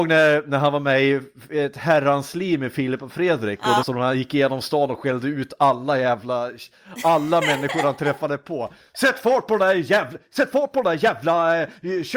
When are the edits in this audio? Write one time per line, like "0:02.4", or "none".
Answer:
0:03.8